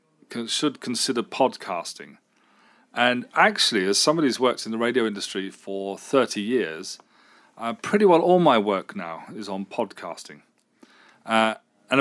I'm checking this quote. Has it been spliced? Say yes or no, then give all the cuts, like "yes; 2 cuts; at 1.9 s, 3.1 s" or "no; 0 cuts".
no; 0 cuts